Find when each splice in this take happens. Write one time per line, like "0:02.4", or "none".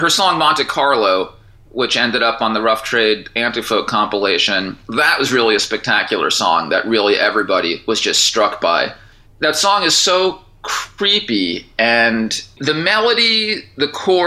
0:12.6

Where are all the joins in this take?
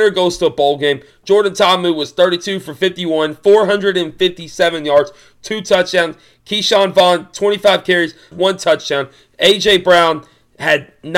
0:08.3

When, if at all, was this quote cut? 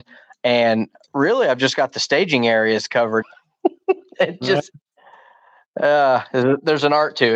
0:03.2

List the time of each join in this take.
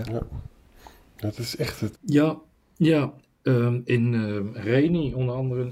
0:01.9

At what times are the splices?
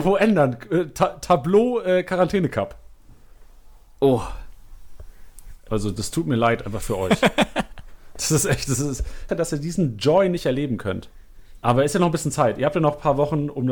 0:05.7
0:09.3
0:11.6

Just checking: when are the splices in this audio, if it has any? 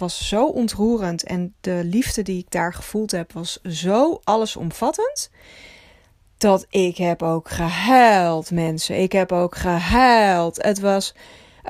none

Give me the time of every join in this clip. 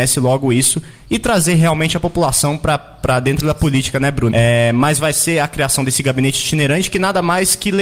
0:04.3

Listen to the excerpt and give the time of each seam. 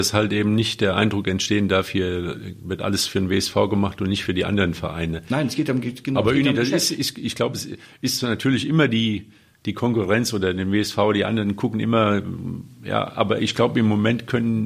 none

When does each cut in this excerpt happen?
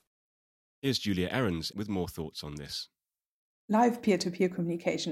0:01.7

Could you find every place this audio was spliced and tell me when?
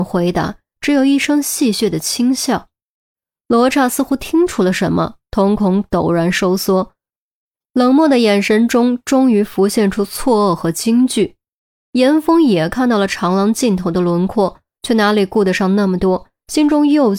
none

